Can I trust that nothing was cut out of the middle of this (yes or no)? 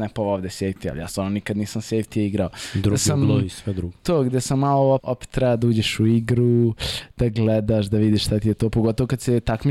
no